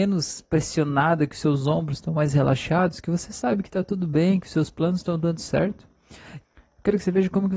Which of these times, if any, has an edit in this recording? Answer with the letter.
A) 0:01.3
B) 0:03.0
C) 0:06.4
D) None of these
C